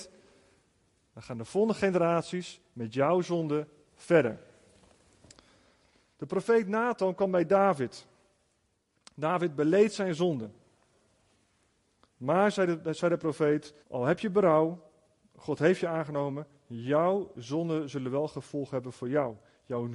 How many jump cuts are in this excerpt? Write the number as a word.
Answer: one